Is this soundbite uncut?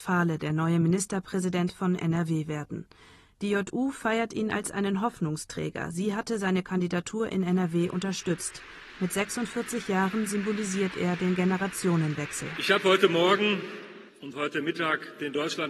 yes; 0 cuts

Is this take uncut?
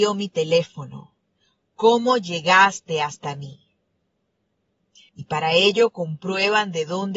no; 1 cut; at 5.1 s

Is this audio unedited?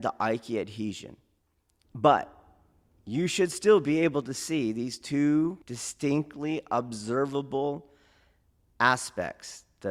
no; 2 cuts; at 1.8 s, 5.6 s

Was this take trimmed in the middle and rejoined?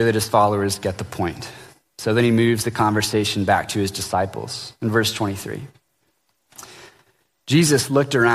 no; 0 cuts

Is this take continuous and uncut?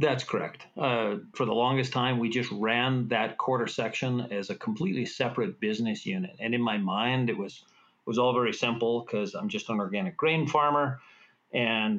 no; 1 cut; at 1.3 s

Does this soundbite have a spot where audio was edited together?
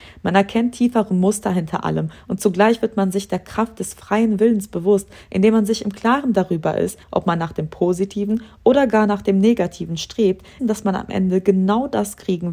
yes; 2 cuts; at 7.0 s, 10.6 s

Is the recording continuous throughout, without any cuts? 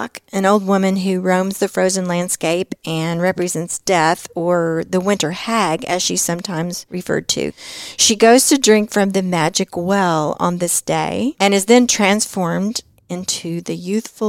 yes; 0 cuts

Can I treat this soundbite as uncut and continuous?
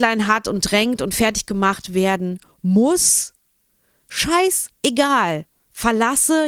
yes; 0 cuts

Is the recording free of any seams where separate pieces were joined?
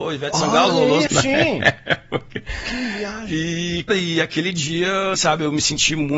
no; 3 cuts; at 1.1 s, 3.9 s, 5.1 s

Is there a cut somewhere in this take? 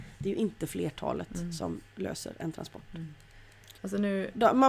yes; 1 cut; at 3.8 s

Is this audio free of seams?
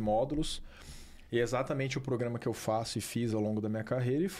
no; 1 cut; at 1.3 s

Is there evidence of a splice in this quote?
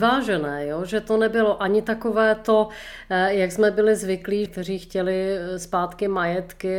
yes; 1 cut; at 4.5 s

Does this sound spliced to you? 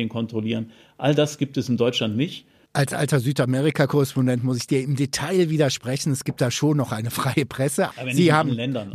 yes; 2 cuts; at 2.7 s, 7.9 s

